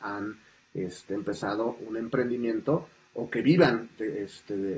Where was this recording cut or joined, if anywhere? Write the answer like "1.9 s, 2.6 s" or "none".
1.8 s